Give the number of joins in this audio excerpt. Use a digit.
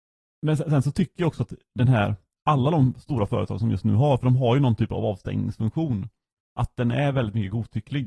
0